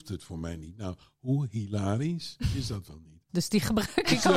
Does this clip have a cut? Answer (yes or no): yes